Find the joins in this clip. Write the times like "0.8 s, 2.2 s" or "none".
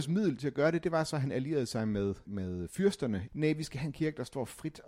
2.2 s, 3.3 s